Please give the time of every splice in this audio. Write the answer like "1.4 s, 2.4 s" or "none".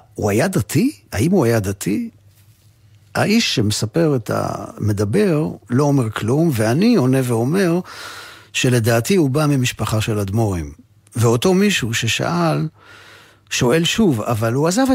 none